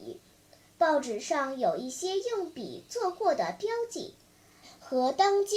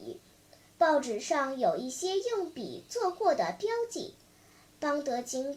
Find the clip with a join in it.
first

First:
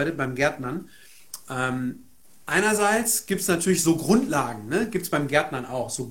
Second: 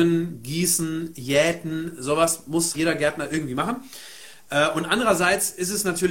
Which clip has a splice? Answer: second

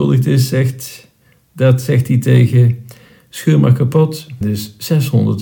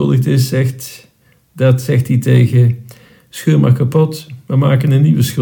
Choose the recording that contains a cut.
first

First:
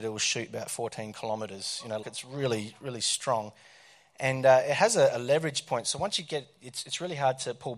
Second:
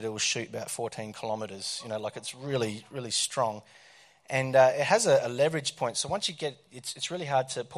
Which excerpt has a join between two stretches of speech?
first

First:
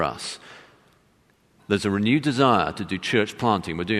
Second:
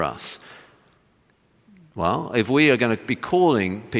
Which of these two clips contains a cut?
first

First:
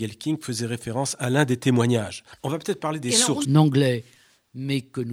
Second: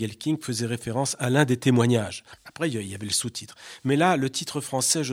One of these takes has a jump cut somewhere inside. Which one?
first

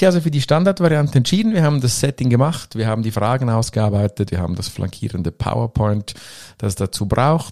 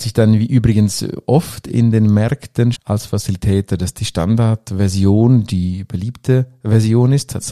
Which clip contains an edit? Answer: second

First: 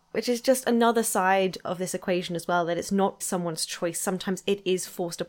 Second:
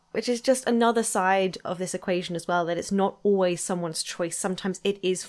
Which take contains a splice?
first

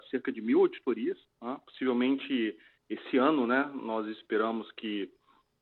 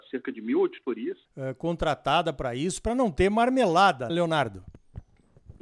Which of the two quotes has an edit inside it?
second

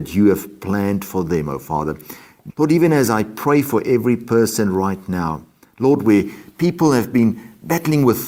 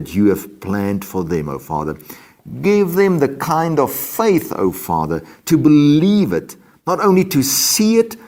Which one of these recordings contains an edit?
first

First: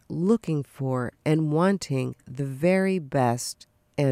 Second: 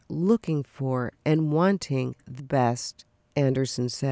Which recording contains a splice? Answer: second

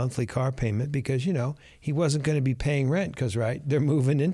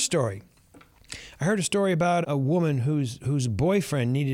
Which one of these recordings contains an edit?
second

